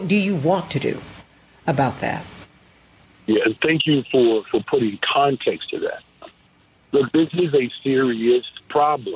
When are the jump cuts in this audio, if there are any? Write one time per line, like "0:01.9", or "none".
none

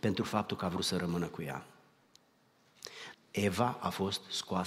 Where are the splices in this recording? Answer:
0:03.1

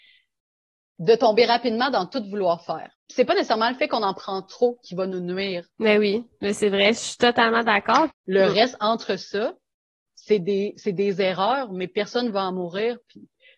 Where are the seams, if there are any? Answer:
0:02.9
0:05.7
0:08.1

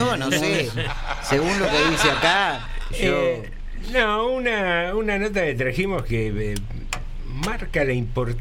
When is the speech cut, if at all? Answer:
none

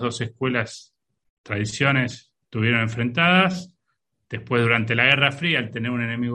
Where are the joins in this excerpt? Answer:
none

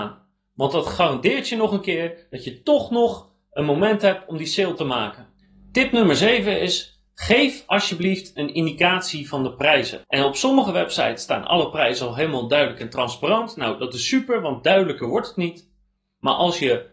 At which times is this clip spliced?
0:10.0

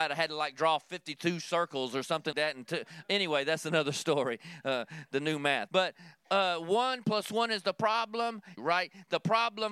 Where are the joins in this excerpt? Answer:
0:02.3
0:05.7
0:08.6

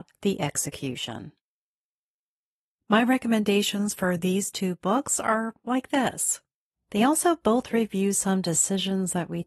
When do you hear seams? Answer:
0:06.7

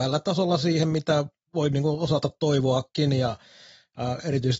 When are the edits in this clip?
0:01.5

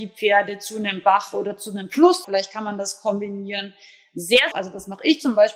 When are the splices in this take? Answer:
0:02.2
0:04.5

